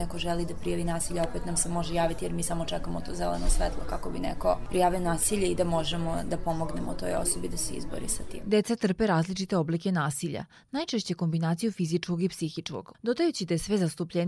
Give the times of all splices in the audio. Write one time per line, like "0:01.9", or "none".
0:12.9